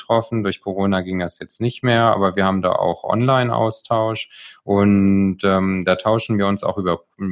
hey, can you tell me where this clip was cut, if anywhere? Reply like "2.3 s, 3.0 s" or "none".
none